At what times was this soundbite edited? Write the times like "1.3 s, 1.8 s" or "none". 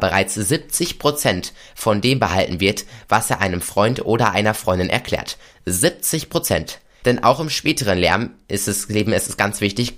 7.0 s